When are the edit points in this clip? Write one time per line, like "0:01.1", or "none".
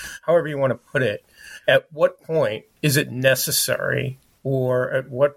none